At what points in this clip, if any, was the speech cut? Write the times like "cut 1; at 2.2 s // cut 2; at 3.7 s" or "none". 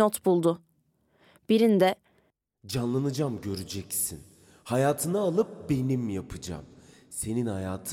none